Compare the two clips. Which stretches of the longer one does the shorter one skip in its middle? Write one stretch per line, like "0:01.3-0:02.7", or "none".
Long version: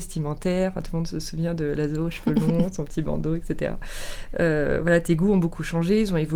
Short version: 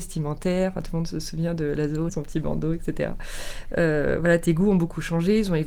0:02.1-0:02.7